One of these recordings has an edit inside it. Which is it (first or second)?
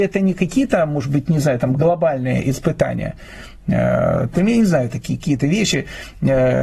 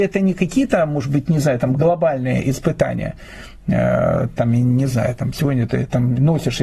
first